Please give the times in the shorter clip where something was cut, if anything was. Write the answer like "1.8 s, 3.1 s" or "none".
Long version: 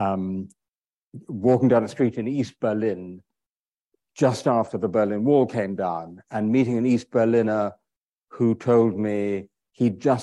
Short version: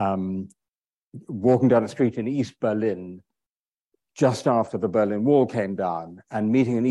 none